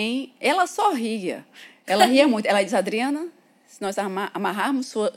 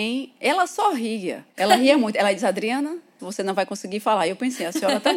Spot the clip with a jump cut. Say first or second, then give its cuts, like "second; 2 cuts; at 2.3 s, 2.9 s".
second; 2 cuts; at 1.5 s, 3.2 s